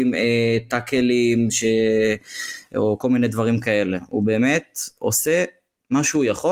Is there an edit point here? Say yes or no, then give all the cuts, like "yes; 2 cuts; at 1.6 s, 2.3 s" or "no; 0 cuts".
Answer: no; 0 cuts